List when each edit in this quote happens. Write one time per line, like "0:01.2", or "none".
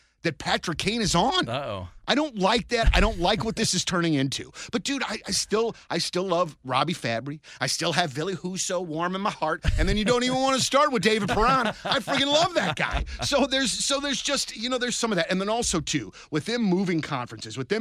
none